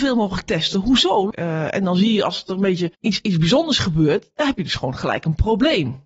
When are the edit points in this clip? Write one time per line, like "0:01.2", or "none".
0:01.3
0:02.9

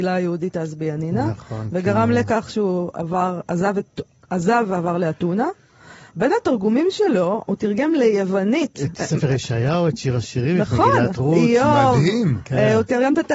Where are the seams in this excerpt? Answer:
none

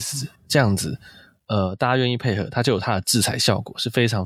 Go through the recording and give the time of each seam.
none

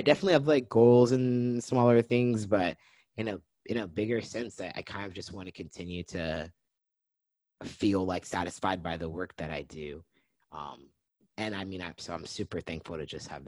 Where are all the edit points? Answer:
0:12.0

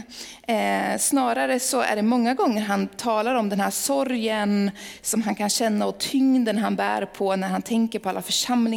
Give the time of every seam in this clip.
none

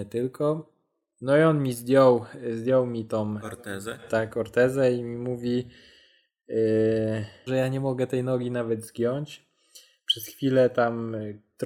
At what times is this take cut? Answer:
0:07.5

